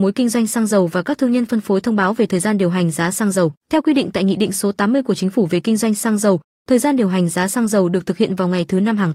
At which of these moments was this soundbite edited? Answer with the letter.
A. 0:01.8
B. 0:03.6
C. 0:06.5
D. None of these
B